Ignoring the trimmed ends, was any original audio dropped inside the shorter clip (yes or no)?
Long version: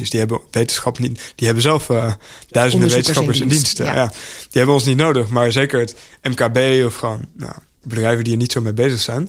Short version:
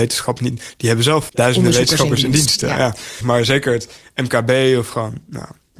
yes